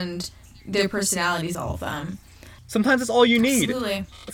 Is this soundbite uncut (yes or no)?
no